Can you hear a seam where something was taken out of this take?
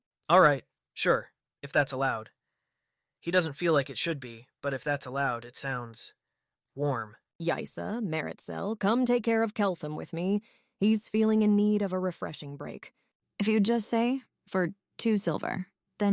no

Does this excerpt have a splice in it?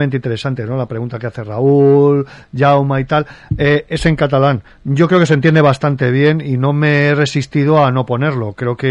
no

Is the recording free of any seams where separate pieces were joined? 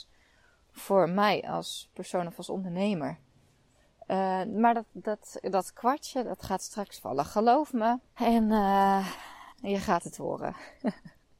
no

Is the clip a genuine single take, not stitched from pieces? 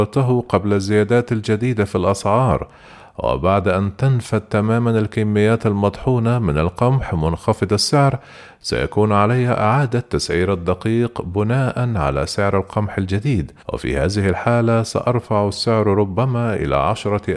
no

